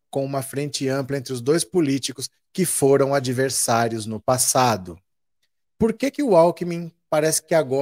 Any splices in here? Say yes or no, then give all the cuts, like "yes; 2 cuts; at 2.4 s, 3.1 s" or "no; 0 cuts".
yes; 1 cut; at 5.6 s